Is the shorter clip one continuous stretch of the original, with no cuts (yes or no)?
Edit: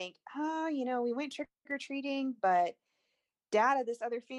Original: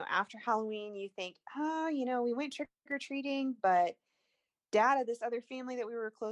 yes